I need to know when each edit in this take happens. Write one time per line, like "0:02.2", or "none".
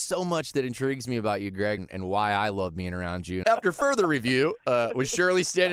0:01.8
0:03.4